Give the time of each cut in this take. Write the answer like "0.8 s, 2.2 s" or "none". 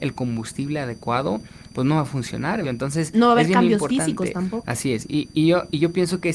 2.6 s, 4.6 s